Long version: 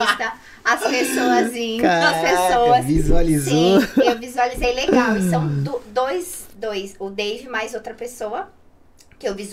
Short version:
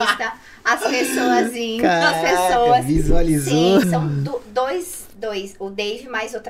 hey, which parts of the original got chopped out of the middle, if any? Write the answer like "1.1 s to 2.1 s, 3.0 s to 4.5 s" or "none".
3.8 s to 5.2 s